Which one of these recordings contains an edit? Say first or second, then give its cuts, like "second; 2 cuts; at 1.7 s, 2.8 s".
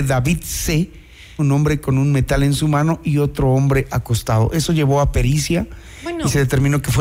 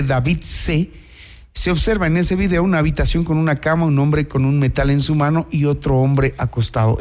first; 1 cut; at 1.4 s